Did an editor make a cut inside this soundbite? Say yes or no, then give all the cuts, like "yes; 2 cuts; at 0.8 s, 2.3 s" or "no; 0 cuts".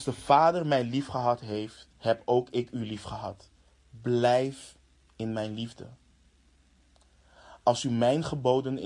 yes; 1 cut; at 1.9 s